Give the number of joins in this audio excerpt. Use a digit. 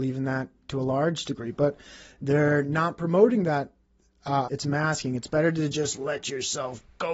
1